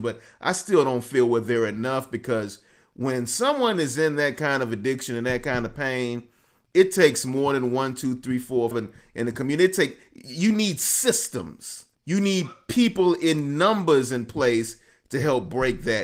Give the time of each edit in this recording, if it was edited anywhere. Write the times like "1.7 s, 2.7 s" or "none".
8.7 s, 11.9 s